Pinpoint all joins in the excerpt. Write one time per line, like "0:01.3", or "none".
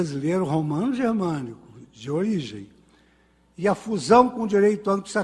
none

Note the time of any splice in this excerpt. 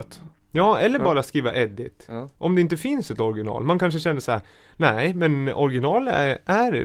none

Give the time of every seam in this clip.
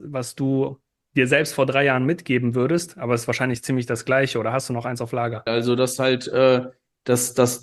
0:05.5

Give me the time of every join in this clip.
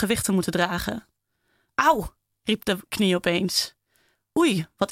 0:01.7

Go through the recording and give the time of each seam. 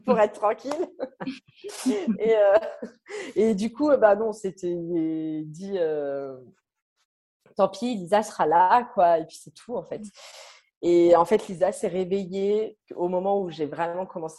none

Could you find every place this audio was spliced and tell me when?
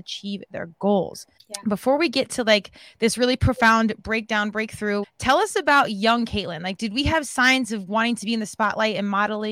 0:01.4
0:05.0

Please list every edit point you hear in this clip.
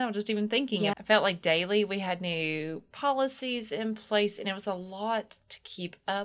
0:00.9

